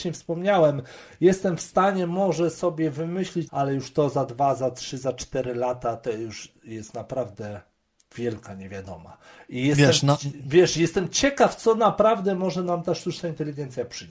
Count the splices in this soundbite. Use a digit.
1